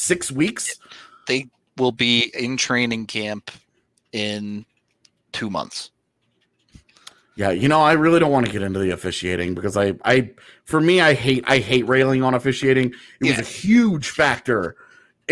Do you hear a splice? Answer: no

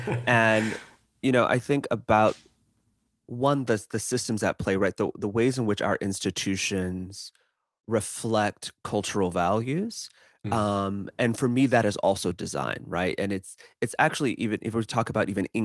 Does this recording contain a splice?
no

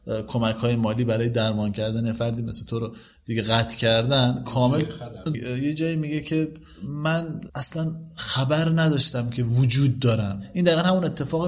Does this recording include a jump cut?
yes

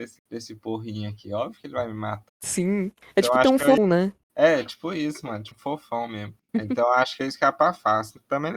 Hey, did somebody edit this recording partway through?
yes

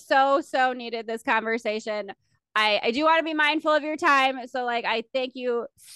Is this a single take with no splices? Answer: yes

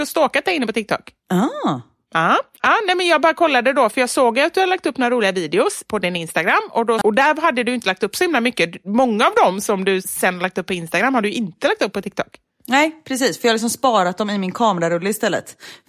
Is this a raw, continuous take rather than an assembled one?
no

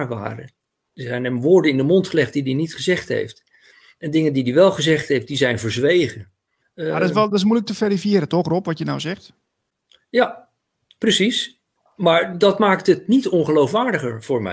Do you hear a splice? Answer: yes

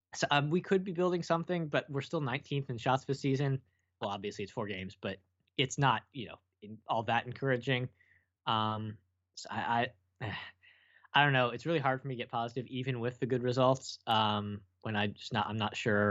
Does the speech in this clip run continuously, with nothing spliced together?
no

